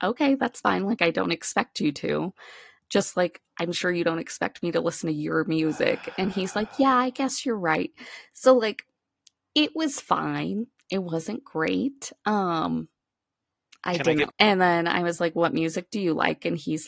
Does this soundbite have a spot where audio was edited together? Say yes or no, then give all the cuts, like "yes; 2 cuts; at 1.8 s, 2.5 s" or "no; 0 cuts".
yes; 1 cut; at 14.3 s